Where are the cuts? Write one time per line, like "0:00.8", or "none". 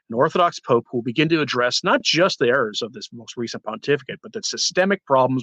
none

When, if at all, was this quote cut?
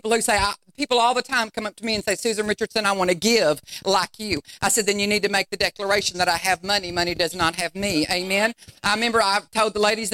none

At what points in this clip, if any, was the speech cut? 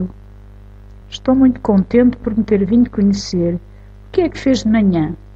0:01.0

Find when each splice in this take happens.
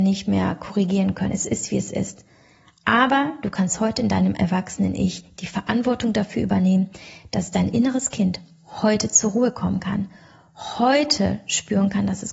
none

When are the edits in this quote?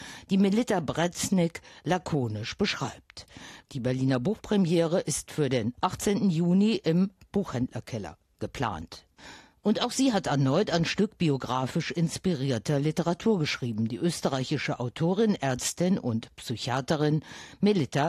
0:03.7

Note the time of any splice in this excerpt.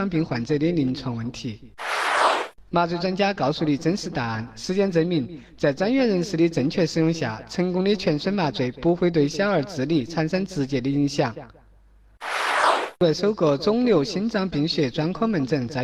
0:02.7

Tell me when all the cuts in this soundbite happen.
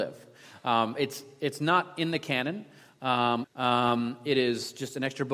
0:03.4

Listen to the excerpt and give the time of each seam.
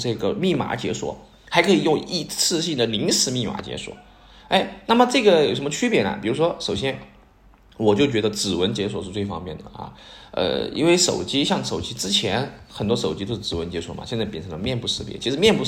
none

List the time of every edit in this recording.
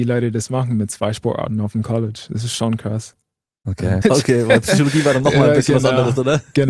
0:04.0

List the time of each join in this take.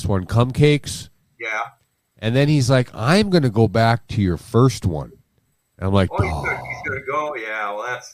none

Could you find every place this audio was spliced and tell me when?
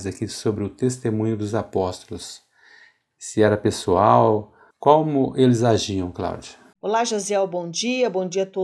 0:04.7
0:06.8

